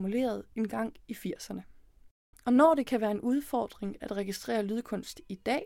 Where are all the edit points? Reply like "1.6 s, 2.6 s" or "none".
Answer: none